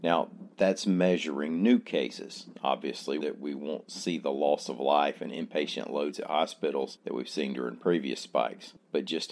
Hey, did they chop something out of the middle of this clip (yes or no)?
yes